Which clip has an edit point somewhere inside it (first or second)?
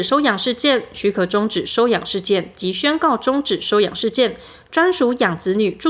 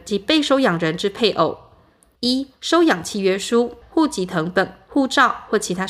second